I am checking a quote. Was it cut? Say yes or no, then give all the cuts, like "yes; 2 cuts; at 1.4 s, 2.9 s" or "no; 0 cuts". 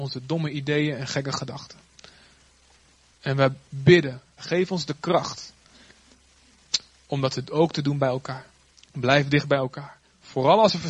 yes; 2 cuts; at 4.4 s, 8.7 s